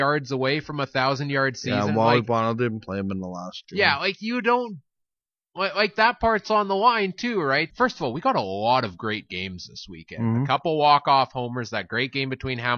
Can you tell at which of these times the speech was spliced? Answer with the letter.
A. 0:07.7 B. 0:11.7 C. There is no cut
A